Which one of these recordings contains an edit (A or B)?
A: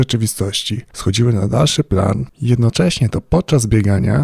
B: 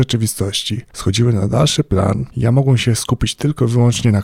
A